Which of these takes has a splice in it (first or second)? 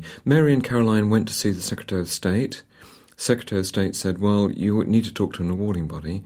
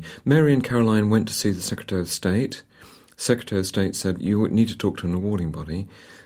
second